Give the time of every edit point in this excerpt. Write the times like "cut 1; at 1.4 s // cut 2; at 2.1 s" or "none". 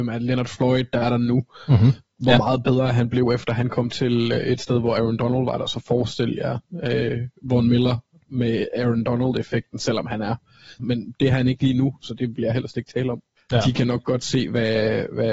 cut 1; at 10.8 s // cut 2; at 13.4 s